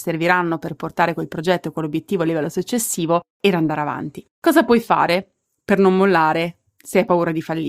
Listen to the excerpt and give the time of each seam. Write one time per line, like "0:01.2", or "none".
0:04.3

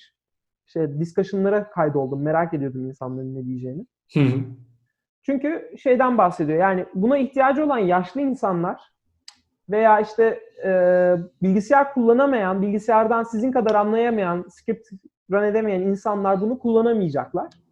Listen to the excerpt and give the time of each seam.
none

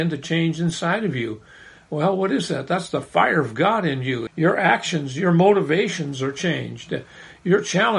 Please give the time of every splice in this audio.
0:04.3

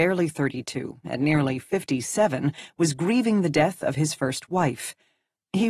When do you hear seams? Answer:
0:01.0

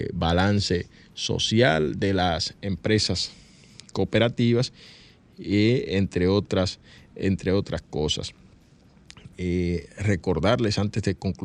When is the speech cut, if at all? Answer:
none

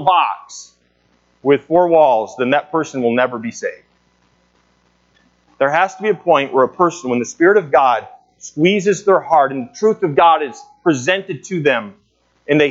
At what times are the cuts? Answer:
none

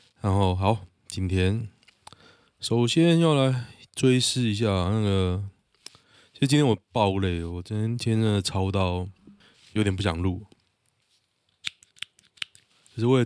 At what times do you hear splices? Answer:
none

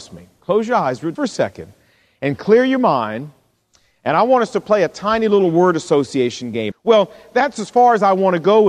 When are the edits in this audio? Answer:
0:01.2
0:06.7

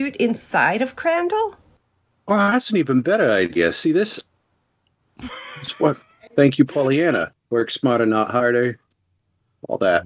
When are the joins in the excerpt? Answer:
0:06.3
0:07.3

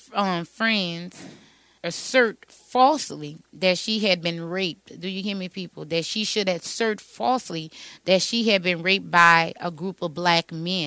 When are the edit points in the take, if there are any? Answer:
0:01.8

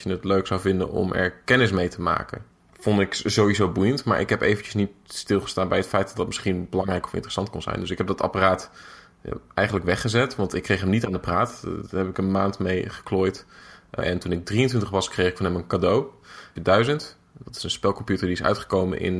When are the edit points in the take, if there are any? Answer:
0:14.0
0:16.6

